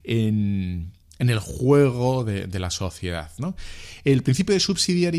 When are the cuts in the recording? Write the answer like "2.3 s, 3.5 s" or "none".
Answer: none